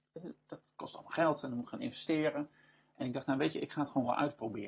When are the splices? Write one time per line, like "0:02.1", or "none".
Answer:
none